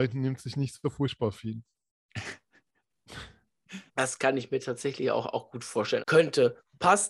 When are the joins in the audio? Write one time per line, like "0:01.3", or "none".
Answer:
0:03.9
0:06.0